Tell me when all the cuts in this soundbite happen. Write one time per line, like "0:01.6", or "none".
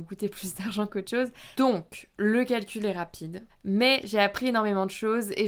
0:01.5
0:03.5